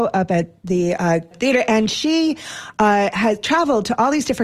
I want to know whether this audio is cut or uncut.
cut